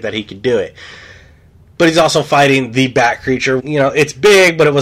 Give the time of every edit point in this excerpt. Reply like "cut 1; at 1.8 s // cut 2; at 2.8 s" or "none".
cut 1; at 3.6 s